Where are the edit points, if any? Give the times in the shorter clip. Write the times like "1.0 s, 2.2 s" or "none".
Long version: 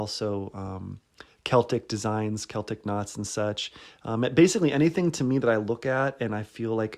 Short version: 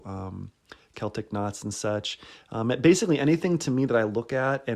0.9 s